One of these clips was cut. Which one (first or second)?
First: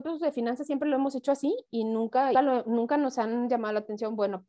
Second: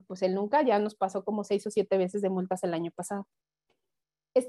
first